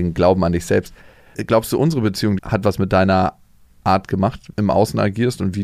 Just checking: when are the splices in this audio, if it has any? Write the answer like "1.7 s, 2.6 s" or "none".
2.4 s, 4.5 s